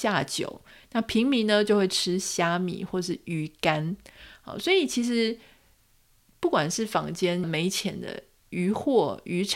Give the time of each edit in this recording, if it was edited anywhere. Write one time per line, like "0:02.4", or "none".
0:07.4